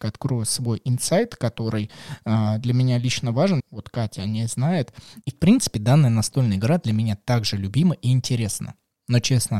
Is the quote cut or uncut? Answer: cut